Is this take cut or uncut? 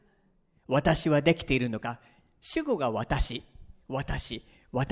uncut